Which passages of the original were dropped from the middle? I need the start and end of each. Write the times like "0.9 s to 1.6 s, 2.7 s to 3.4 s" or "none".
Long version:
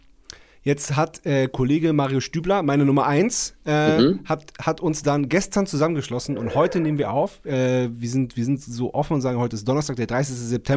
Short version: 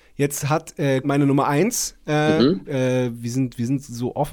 1.5 s to 2.6 s, 4.2 s to 7.4 s